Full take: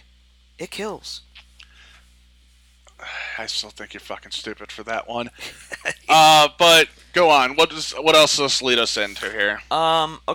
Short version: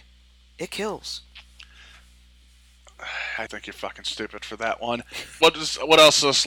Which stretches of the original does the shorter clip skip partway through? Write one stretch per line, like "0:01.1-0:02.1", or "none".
0:03.5-0:03.7
0:05.7-0:07.6